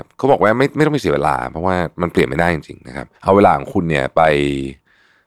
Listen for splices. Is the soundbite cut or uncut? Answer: cut